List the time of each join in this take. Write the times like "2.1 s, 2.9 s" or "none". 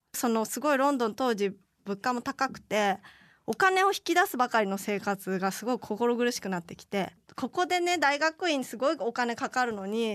none